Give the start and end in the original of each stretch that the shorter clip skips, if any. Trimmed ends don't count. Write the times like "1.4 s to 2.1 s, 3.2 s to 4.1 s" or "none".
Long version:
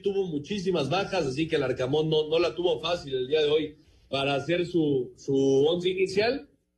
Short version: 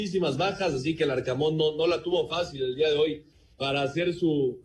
none

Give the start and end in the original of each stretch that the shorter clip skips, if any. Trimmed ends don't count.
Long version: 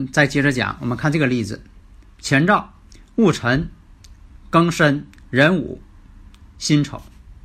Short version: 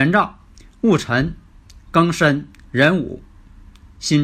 4.2 s to 4.5 s

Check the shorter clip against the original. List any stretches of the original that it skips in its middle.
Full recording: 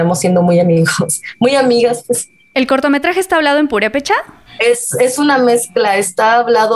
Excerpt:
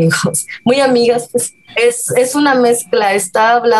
2.4 s to 4.5 s

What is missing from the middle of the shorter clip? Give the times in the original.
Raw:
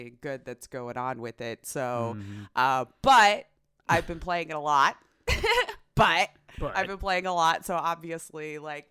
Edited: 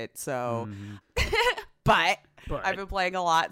2.5 s to 5.1 s

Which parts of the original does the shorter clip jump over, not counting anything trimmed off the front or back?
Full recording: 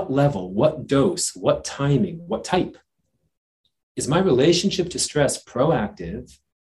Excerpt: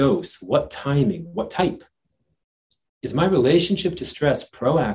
none

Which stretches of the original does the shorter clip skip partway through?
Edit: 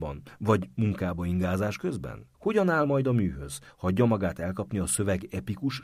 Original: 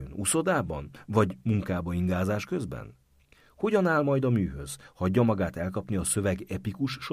3.0 s to 3.5 s

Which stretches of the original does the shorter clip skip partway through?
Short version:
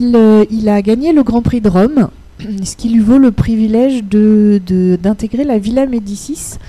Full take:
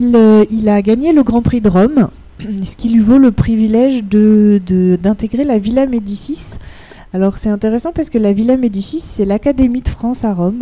none

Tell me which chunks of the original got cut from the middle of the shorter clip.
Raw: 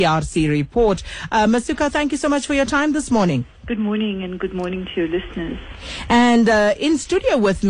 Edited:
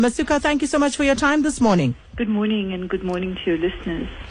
none

